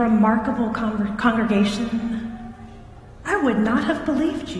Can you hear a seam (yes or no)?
yes